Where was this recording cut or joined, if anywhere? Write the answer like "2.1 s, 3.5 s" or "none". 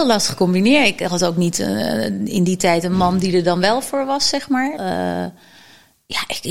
4.8 s